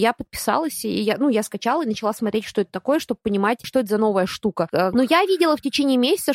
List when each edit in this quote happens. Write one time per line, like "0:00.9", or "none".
0:04.9